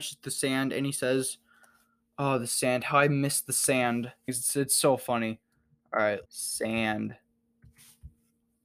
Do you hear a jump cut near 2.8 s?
no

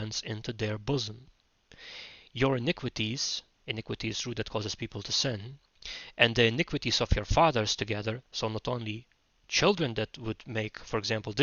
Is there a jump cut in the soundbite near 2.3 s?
no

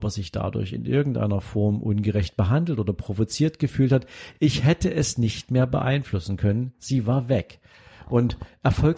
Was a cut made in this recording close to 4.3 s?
no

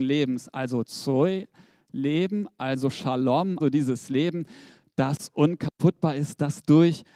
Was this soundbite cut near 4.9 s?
no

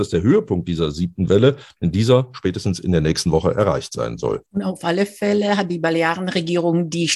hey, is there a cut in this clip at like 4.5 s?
yes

